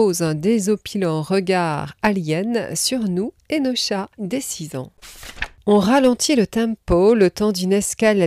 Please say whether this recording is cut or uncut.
cut